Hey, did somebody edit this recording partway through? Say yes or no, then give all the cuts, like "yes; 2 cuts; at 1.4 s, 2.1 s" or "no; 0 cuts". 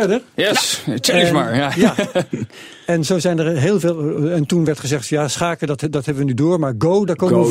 no; 0 cuts